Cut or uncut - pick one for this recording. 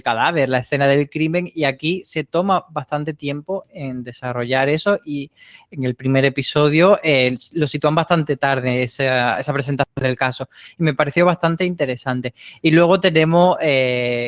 uncut